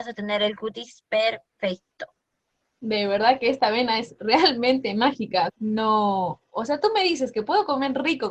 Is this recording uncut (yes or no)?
no